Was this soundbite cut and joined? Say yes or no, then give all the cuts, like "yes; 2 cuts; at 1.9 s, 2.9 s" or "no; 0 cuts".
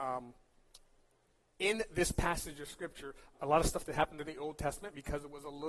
yes; 1 cut; at 3.3 s